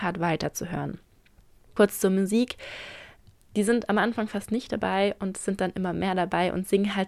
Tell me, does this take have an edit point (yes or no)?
yes